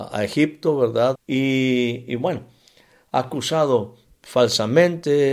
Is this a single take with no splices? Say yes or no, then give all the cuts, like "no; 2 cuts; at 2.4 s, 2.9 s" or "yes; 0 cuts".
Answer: no; 1 cut; at 1.1 s